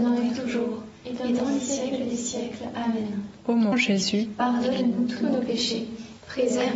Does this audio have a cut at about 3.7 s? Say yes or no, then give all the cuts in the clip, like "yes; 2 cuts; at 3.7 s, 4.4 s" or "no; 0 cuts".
yes; 1 cut; at 3.7 s